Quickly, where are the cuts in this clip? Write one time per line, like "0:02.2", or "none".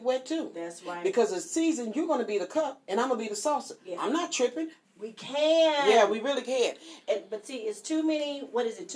0:04.8
0:07.0